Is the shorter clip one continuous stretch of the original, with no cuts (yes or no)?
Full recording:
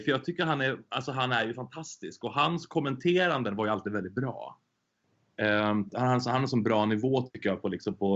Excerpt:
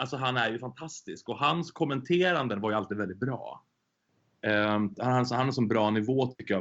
yes